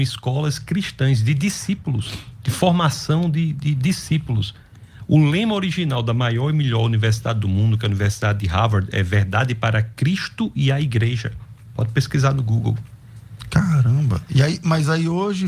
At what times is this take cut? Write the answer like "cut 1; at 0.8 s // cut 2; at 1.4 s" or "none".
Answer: none